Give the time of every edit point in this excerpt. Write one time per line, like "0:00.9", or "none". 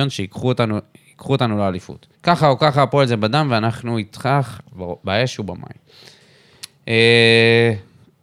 0:02.1